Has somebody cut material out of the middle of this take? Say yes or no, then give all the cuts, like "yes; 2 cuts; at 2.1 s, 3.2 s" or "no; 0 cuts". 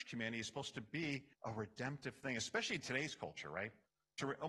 yes; 1 cut; at 1.3 s